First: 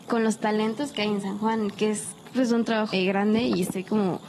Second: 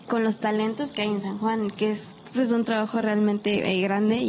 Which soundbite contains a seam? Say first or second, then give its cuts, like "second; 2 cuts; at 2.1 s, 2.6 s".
first; 1 cut; at 2.9 s